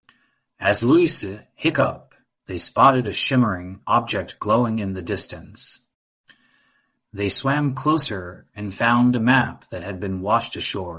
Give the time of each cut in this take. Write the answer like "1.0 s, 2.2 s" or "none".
2.3 s